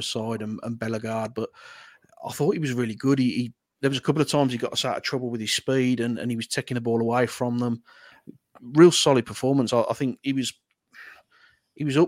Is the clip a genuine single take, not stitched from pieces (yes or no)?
yes